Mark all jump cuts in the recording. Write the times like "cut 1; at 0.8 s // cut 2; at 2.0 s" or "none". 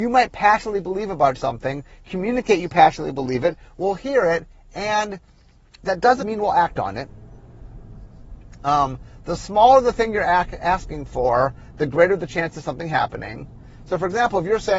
cut 1; at 6.2 s